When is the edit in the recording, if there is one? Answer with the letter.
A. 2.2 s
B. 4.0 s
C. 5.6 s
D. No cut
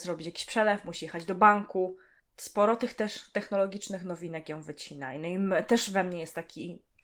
D